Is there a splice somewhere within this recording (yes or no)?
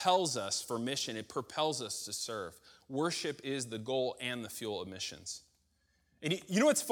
no